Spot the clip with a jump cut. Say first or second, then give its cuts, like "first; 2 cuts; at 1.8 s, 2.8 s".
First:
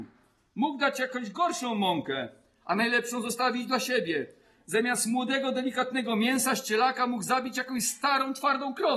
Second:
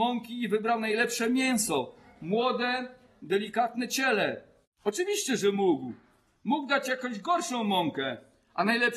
second; 1 cut; at 4.6 s